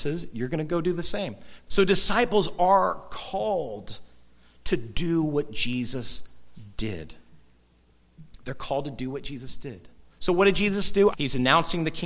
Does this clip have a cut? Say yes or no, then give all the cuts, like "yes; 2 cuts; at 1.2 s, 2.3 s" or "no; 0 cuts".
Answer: yes; 3 cuts; at 1.7 s, 10.1 s, 11.1 s